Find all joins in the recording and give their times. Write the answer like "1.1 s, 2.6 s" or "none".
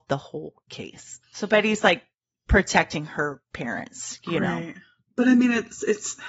1.2 s